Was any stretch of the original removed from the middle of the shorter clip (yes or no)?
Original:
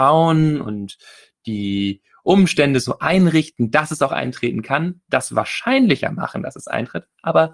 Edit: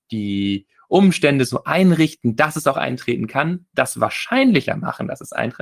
no